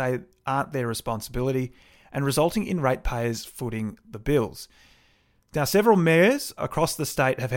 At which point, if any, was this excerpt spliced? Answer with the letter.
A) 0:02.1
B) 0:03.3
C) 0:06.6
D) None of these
C